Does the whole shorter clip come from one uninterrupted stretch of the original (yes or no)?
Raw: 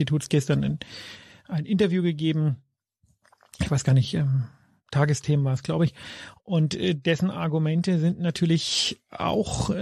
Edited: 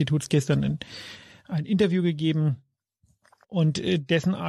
no